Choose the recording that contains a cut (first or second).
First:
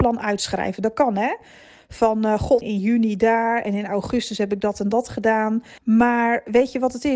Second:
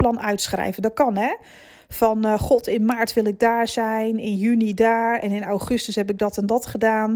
first